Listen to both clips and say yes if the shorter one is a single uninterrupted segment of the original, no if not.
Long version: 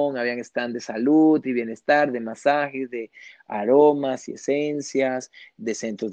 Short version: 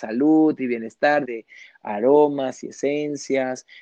no